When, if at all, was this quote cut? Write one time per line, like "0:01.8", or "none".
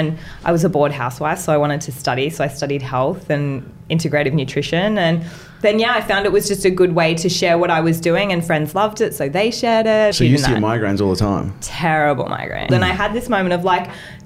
0:10.1
0:12.7